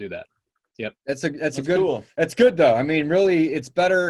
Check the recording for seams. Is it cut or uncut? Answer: uncut